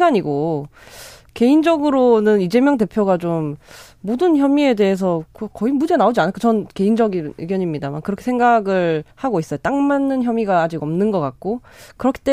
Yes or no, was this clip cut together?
yes